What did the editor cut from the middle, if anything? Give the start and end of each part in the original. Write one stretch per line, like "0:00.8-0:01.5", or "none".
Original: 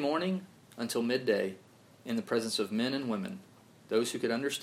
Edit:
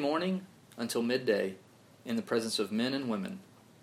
none